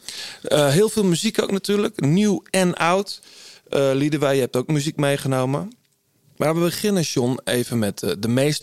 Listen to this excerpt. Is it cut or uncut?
uncut